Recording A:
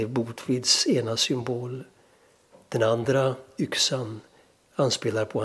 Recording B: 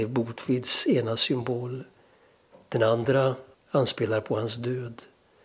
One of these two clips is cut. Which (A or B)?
B